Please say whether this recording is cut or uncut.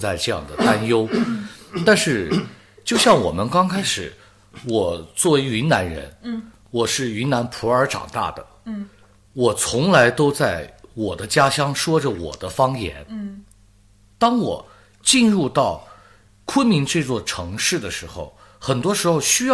uncut